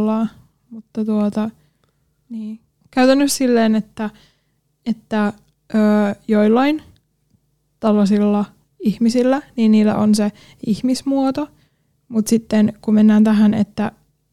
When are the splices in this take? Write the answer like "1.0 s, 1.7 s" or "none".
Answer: none